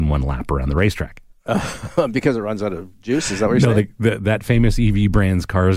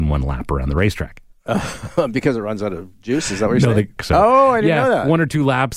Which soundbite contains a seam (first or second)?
second